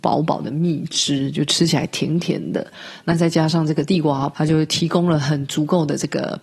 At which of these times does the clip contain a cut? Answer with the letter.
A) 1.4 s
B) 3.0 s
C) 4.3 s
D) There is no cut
C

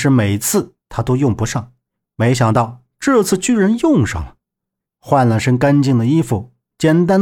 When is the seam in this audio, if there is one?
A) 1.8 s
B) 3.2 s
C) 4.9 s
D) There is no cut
C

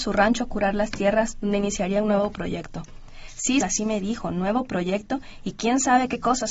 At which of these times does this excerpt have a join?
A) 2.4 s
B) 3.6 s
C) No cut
B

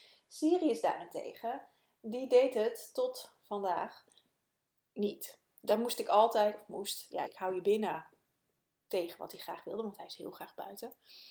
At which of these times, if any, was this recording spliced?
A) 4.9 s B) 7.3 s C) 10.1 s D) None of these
B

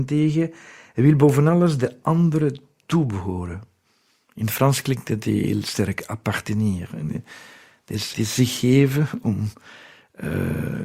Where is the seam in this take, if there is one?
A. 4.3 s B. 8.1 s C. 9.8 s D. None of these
B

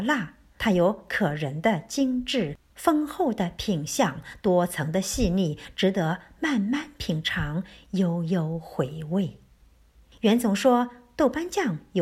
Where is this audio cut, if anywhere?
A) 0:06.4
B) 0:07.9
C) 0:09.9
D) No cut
D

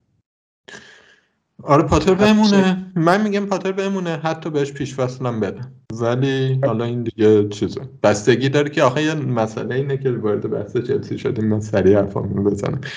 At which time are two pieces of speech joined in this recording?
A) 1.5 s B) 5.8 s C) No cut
B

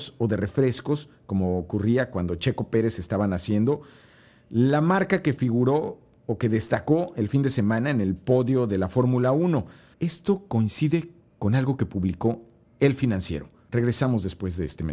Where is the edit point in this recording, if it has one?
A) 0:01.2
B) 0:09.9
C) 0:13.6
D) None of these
B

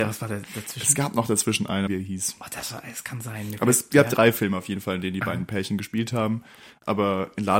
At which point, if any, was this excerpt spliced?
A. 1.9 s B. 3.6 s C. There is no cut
A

